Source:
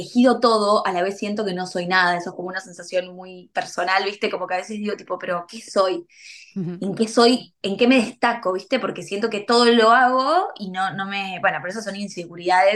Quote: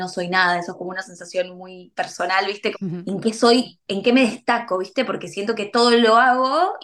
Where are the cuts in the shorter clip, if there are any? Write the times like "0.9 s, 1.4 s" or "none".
2.7 s